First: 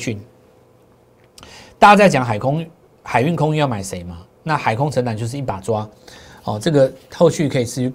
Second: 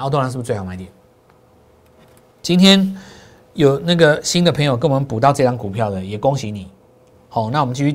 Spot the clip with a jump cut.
second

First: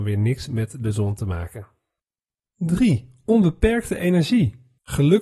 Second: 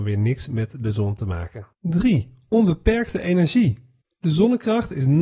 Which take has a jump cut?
second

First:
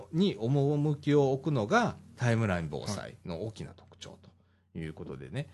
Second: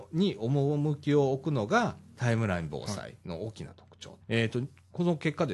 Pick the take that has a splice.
second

